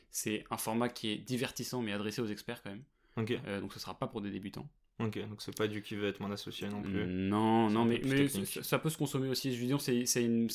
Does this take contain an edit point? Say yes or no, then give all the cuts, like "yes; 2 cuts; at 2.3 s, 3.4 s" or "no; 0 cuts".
no; 0 cuts